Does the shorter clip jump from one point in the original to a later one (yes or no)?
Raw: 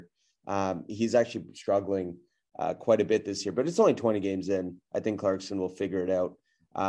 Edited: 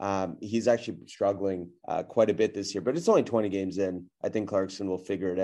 yes